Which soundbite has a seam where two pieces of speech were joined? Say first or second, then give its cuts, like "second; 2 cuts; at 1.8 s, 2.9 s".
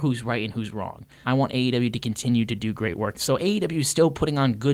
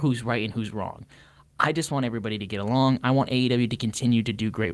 first; 2 cuts; at 1.2 s, 3.1 s